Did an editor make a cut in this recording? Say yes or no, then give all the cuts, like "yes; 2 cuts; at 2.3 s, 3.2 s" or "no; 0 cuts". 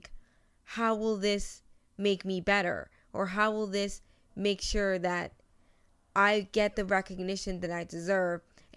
no; 0 cuts